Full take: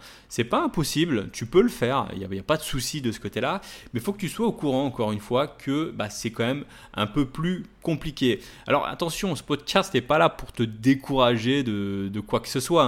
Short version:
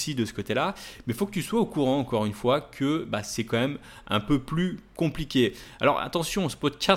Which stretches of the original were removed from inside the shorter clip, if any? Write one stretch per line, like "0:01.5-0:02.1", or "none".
none

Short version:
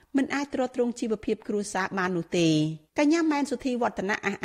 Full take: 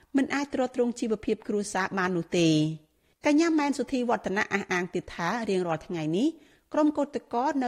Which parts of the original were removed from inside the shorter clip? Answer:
0:02.9-0:03.1

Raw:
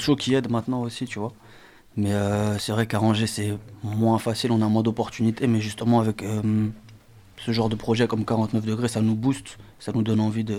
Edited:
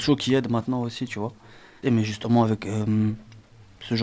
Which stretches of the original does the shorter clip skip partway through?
0:01.8-0:05.4

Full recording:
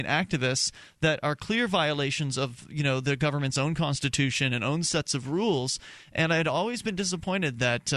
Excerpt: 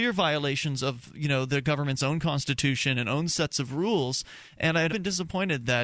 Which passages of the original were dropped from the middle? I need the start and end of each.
0:06.4-0:06.8

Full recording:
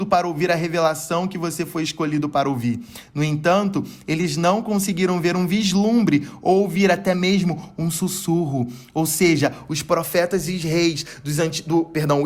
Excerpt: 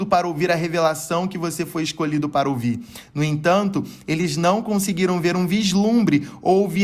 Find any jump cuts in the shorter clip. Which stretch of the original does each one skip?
none

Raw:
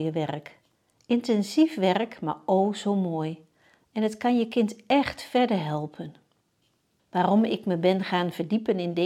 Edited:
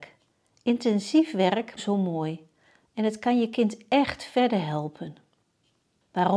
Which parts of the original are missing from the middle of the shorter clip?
0:02.2-0:02.7

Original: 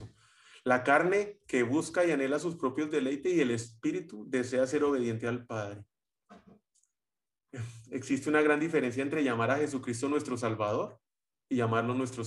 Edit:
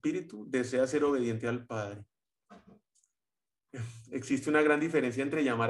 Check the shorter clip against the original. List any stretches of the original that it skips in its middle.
none

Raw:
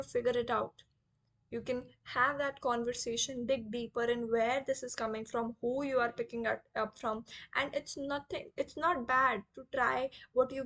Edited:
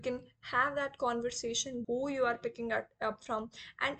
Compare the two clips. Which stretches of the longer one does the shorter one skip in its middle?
0:03.5-0:05.6

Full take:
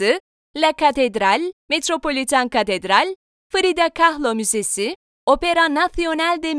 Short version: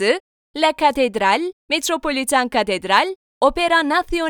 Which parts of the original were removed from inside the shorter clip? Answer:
0:03.3-0:05.1

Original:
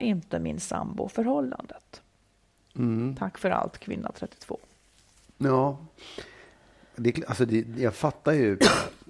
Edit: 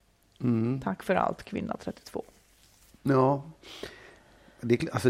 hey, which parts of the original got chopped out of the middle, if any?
none

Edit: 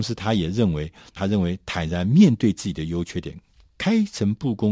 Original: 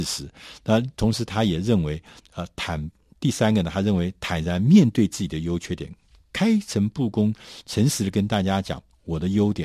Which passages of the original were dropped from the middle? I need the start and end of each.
0:02.3-0:03.7

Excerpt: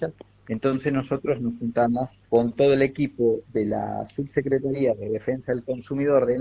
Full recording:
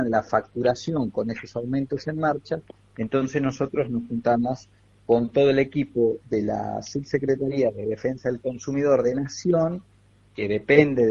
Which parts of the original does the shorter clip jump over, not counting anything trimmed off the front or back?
0:04.7-0:05.0

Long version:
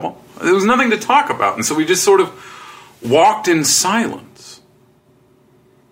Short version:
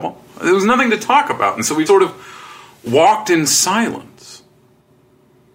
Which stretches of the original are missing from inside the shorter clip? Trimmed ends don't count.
0:01.9-0:02.0

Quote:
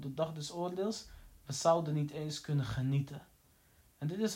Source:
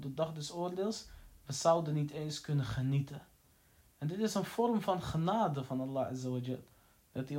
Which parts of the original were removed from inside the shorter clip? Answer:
none

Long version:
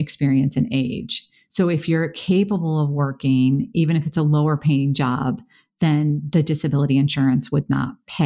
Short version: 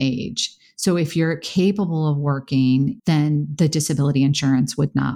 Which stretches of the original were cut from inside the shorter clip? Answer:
0:03.7-0:05.7

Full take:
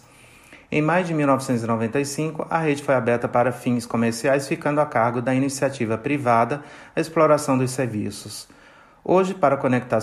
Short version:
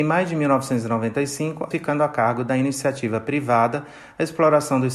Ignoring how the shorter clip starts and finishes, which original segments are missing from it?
0:02.5-0:04.5

